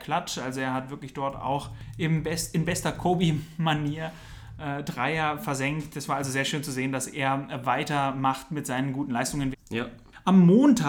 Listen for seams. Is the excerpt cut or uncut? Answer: cut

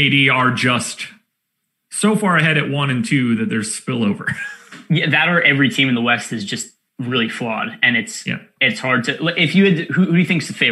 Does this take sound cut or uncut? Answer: uncut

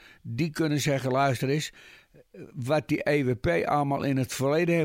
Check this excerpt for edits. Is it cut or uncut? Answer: uncut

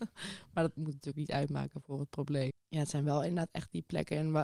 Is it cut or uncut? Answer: cut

